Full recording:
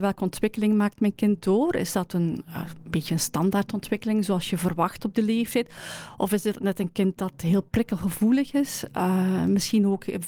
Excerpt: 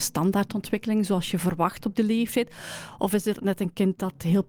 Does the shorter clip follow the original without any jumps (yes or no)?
yes